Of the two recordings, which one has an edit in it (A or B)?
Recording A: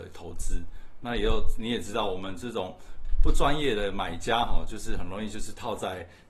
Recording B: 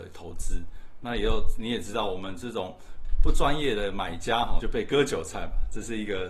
B